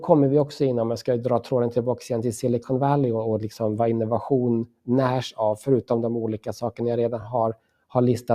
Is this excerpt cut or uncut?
uncut